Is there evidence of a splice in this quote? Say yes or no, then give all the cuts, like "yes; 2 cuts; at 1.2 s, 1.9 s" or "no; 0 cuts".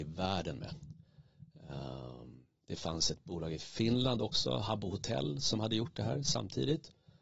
no; 0 cuts